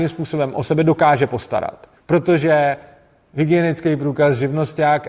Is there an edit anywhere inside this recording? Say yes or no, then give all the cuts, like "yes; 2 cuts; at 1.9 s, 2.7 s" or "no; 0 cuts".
yes; 1 cut; at 2.0 s